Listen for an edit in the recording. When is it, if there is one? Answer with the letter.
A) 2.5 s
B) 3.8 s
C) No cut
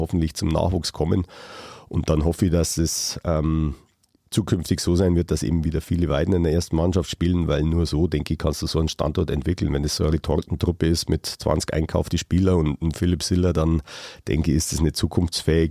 C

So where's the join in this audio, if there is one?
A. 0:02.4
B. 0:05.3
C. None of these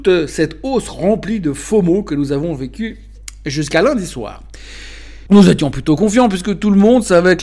B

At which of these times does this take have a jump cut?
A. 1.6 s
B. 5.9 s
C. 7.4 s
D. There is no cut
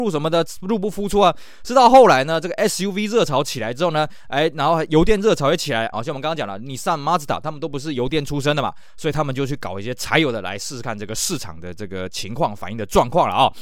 B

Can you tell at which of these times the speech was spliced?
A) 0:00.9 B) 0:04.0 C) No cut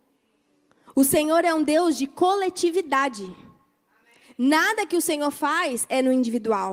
C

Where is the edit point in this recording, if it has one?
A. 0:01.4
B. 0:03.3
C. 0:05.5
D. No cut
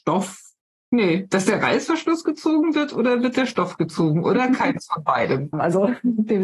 C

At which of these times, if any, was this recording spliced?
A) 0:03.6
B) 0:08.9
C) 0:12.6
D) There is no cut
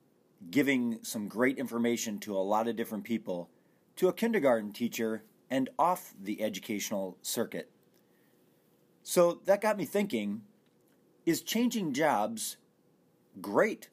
D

